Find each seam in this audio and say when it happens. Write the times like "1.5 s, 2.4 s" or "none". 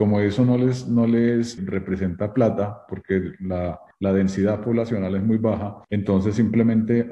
1.6 s, 5.8 s